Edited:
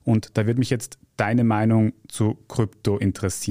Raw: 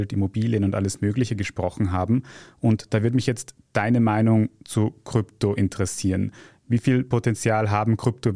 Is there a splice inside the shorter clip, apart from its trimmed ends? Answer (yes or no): no